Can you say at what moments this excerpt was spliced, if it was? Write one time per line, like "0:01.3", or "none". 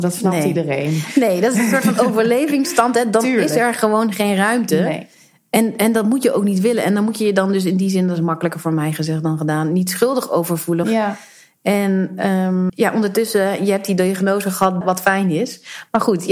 0:10.8
0:12.7
0:14.8